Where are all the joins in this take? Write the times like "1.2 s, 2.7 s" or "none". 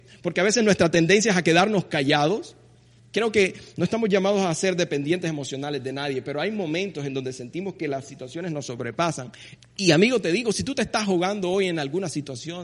3.0 s, 9.6 s